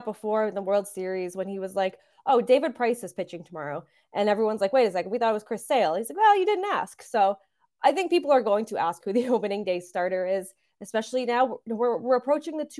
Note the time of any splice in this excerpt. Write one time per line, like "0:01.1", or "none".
none